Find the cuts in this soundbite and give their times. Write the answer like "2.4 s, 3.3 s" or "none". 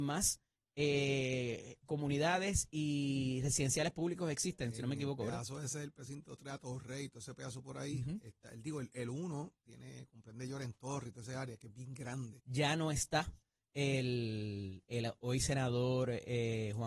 12.4 s